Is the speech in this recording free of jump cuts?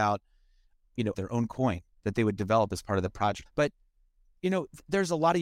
no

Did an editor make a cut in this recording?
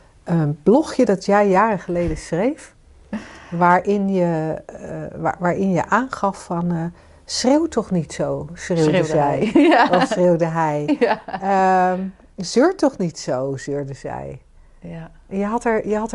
no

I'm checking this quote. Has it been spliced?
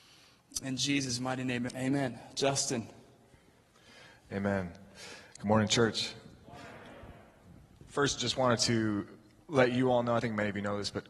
yes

